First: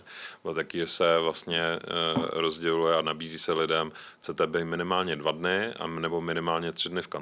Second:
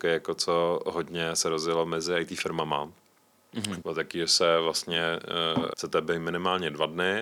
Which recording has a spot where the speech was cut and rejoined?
second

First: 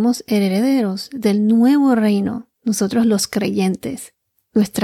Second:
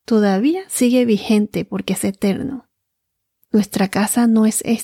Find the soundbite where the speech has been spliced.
second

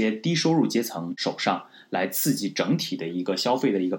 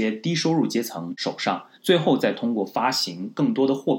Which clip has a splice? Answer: second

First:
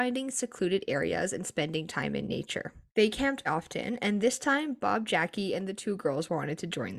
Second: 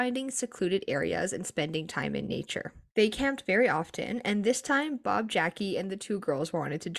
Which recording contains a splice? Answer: first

